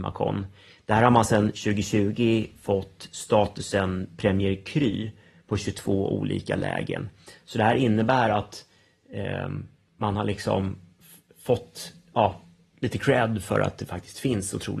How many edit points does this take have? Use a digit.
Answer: 0